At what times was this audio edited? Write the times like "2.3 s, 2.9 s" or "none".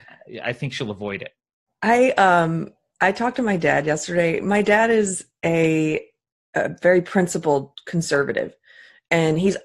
none